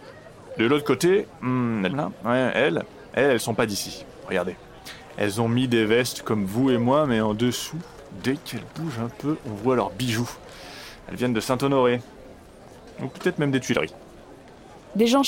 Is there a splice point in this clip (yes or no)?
yes